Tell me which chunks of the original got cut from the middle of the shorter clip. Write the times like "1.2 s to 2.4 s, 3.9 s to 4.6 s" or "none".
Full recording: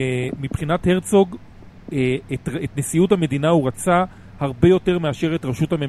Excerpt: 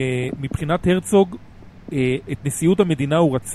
2.3 s to 2.6 s